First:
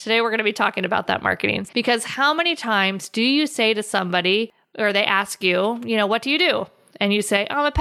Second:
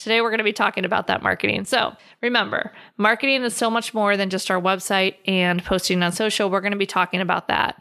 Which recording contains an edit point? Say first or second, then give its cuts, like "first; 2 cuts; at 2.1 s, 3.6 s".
first; 1 cut; at 1.7 s